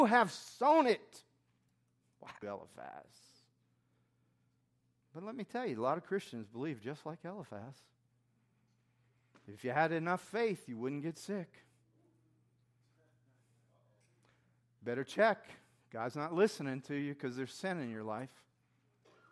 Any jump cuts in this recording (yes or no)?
yes